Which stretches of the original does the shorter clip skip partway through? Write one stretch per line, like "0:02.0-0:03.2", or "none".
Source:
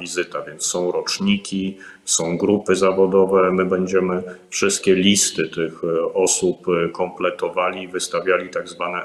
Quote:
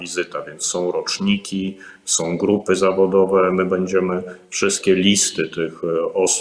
none